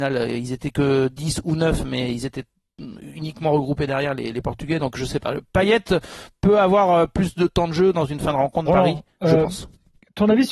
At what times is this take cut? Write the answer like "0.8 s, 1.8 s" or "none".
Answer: 8.7 s